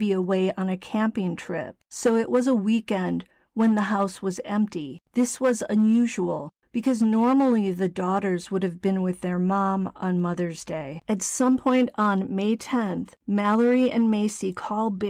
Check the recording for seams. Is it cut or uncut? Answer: uncut